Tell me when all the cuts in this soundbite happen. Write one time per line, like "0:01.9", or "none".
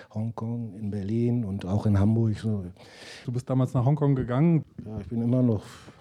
0:03.2
0:04.6